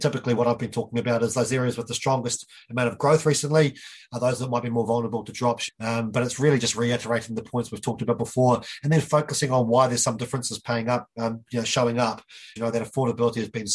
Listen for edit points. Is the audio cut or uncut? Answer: cut